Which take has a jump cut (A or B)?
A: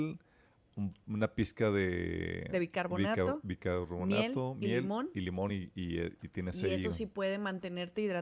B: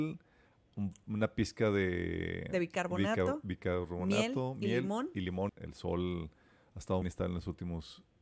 B